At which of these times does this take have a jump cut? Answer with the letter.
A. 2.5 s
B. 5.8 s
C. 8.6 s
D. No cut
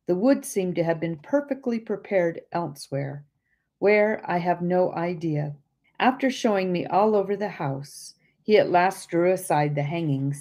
B